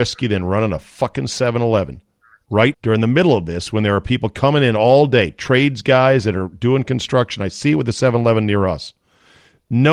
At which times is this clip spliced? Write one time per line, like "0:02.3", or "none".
0:02.7